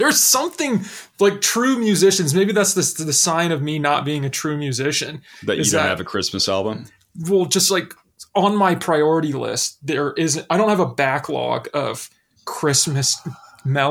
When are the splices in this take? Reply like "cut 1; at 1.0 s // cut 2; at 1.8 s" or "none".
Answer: none